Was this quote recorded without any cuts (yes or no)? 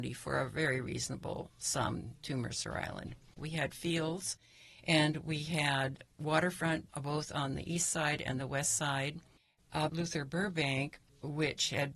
no